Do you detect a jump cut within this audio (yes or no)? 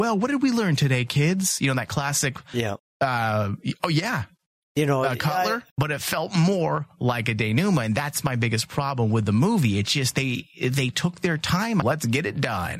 yes